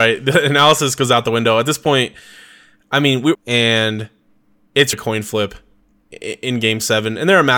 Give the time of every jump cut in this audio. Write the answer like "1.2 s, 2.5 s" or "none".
3.3 s, 4.9 s